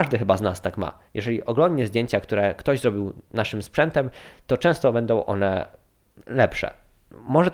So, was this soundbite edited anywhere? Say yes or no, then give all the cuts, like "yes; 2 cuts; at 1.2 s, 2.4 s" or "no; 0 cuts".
no; 0 cuts